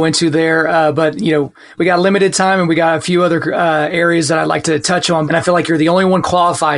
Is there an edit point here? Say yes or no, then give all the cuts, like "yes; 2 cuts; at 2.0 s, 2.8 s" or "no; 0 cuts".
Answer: yes; 1 cut; at 5.3 s